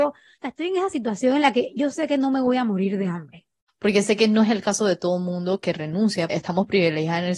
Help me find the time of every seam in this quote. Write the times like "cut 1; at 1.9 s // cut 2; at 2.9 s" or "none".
cut 1; at 3.7 s // cut 2; at 6.3 s

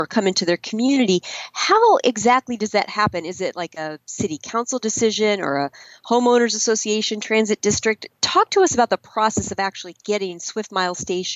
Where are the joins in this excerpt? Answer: none

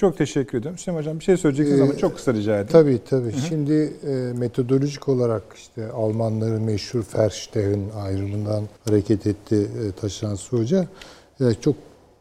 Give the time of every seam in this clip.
cut 1; at 8.8 s

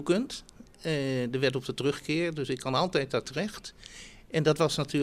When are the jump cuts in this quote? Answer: none

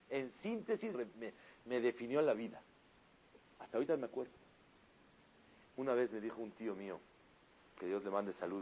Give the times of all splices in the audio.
cut 1; at 0.9 s // cut 2; at 5.6 s

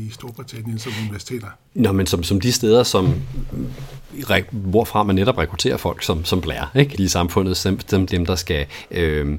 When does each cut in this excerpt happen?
cut 1; at 6.9 s // cut 2; at 8.1 s

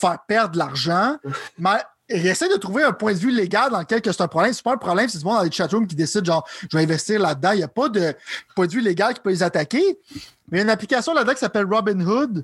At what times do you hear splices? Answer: none

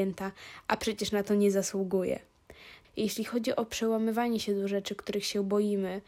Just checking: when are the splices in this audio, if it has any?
cut 1; at 2.8 s

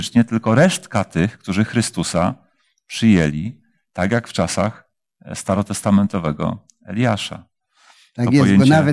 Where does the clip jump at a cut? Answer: none

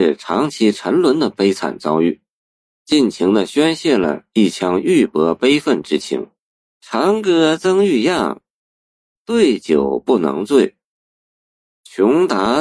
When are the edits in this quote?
cut 1; at 6.7 s

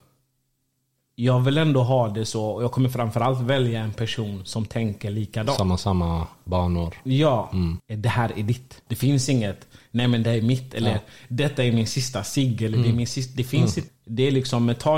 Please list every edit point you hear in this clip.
cut 1; at 7.8 s // cut 2; at 8.9 s // cut 3; at 13.9 s

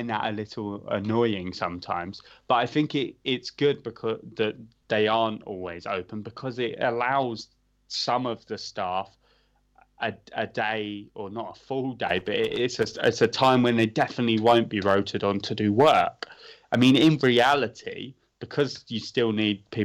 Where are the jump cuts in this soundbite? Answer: none

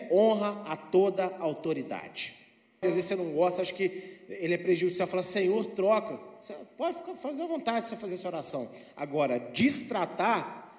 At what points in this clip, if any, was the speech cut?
cut 1; at 2.8 s

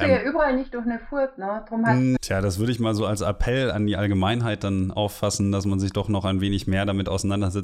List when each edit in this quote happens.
cut 1; at 2.2 s

